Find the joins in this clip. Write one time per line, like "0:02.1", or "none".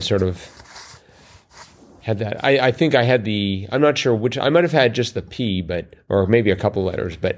none